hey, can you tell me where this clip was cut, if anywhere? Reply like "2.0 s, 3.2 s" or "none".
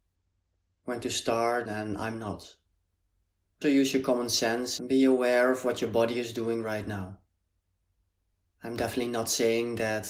1.7 s, 3.6 s, 8.5 s